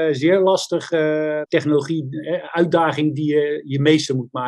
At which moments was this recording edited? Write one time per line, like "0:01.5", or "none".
0:01.4

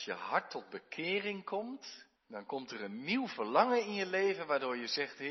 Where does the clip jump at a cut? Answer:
0:02.2

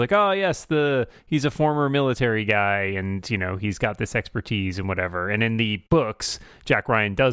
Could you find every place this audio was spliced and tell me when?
none

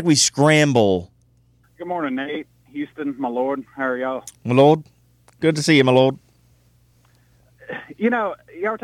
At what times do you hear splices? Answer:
0:01.6

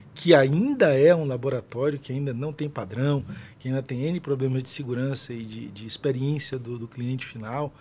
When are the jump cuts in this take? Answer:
none

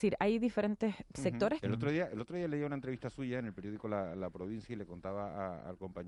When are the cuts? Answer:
0:01.6

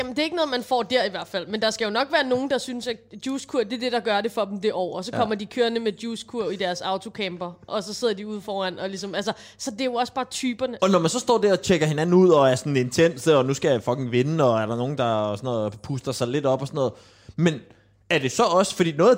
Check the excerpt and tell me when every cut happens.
0:10.8

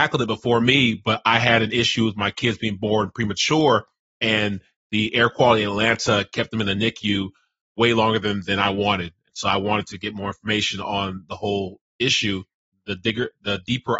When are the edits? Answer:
none

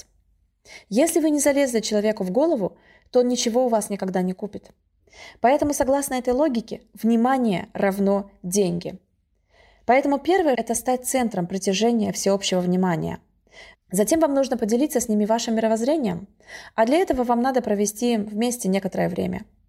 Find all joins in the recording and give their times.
0:10.5
0:13.7

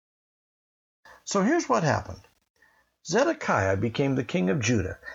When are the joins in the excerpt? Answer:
none

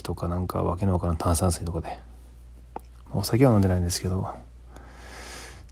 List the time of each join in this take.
none

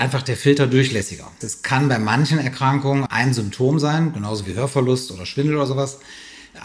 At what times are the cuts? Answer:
0:01.4
0:03.1

